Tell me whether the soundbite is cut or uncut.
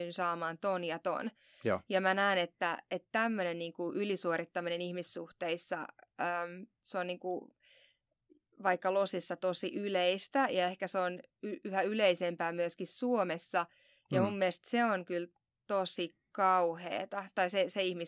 uncut